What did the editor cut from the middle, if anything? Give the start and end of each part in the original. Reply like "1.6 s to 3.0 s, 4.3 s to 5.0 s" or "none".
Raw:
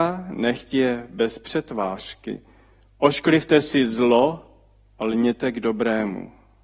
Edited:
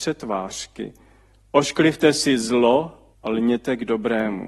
4.6 s to 4.9 s